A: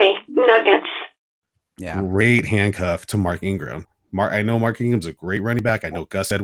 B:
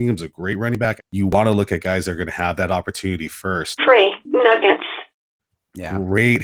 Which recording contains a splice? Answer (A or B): B